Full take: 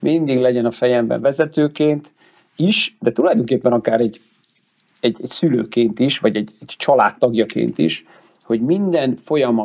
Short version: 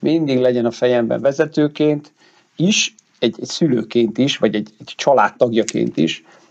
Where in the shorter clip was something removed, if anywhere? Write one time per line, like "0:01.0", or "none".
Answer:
0:03.0